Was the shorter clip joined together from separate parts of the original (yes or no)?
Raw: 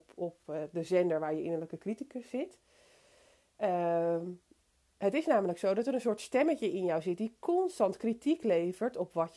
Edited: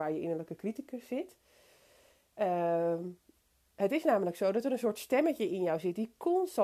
no